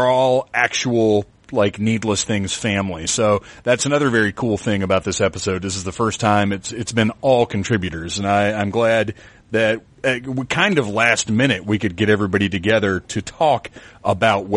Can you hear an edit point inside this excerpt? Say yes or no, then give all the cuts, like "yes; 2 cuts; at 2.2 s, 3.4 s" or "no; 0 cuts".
no; 0 cuts